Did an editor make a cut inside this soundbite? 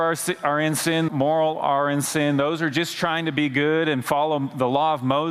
yes; 1 cut; at 1.1 s

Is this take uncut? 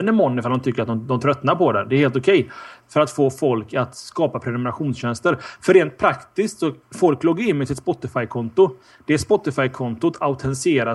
no; 1 cut; at 2.8 s

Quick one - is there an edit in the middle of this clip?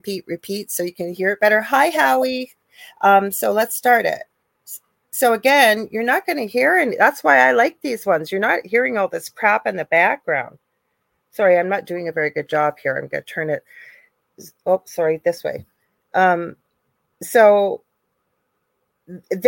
no; 0 cuts

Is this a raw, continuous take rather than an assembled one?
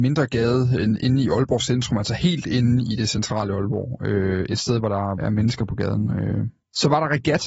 no; 1 cut; at 5.2 s

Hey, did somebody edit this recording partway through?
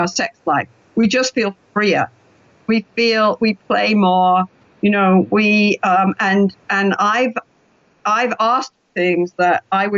no; 0 cuts

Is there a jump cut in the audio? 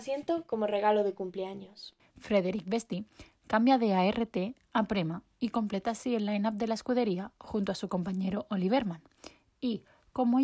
yes; 1 cut; at 2.0 s

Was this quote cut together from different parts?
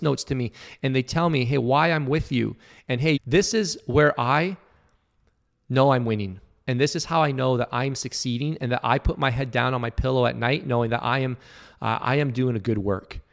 yes; 1 cut; at 3.2 s

